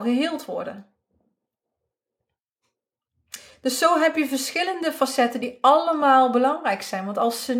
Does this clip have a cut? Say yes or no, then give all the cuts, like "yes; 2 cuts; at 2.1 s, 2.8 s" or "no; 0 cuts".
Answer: no; 0 cuts